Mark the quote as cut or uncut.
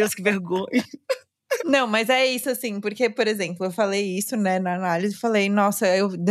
uncut